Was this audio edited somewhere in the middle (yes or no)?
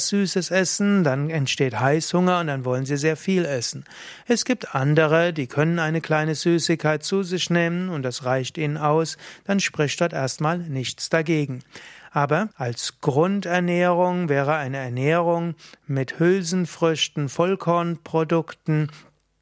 yes